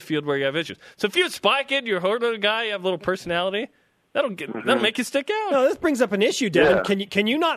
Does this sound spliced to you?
no; 0 cuts

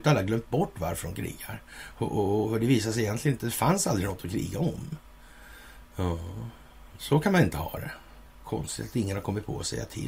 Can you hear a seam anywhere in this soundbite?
yes; 1 cut; at 8.3 s

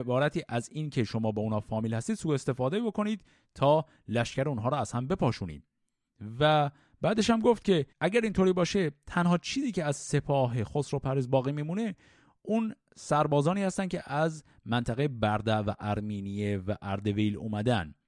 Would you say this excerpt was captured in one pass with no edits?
no; 1 cut; at 7.9 s

